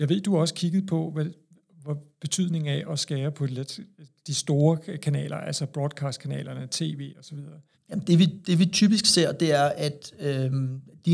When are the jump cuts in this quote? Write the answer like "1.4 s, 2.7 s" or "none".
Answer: 7.7 s